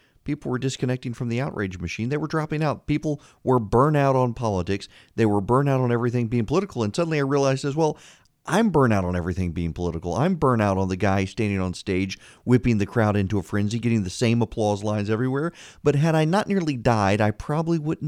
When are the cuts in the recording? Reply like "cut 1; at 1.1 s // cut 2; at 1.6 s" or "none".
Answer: cut 1; at 13.8 s